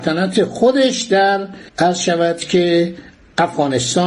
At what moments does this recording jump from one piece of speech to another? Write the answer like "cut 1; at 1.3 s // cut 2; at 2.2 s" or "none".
cut 1; at 1.7 s

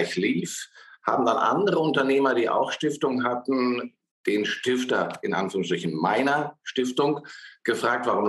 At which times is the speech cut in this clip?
none

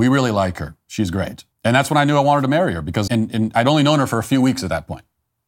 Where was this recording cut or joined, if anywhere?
cut 1; at 1.5 s // cut 2; at 3.1 s

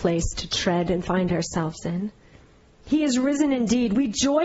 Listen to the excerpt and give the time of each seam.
cut 1; at 2.8 s

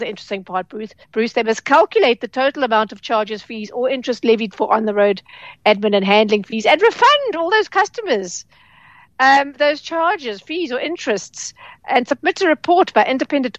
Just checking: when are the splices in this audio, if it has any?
cut 1; at 1.0 s

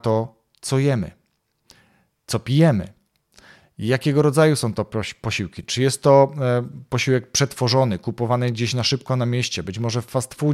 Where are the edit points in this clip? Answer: none

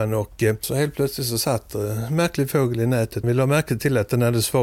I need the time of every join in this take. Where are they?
cut 1; at 3.2 s

